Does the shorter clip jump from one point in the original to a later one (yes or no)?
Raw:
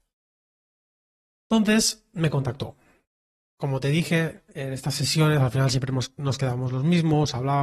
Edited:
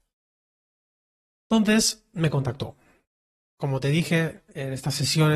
no